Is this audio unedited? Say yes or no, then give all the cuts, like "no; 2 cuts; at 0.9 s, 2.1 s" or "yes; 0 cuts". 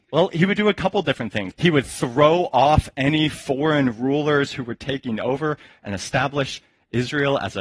no; 1 cut; at 1.5 s